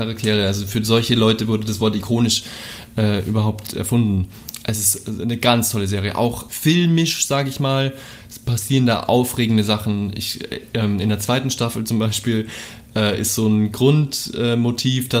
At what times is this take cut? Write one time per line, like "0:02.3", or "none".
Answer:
0:06.5